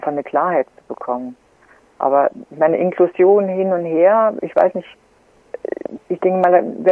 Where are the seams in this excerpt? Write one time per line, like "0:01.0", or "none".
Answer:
0:04.4
0:06.0